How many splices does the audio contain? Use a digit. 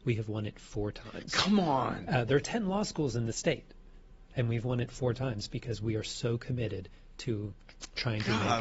0